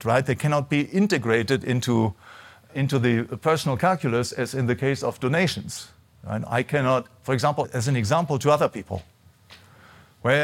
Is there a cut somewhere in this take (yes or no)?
yes